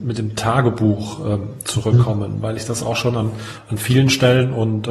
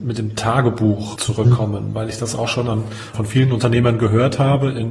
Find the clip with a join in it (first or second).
second